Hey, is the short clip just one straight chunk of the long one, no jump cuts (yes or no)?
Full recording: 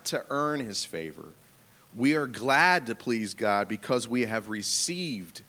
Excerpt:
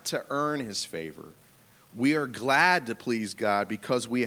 yes